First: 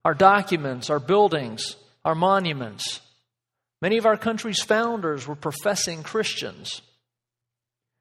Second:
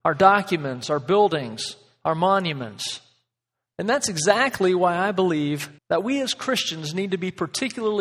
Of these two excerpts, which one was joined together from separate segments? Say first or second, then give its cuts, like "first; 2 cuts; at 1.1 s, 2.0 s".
second; 2 cuts; at 3.7 s, 5.8 s